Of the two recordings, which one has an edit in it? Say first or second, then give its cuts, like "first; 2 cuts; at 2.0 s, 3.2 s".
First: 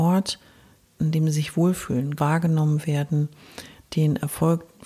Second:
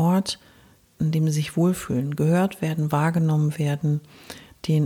first; 1 cut; at 2.2 s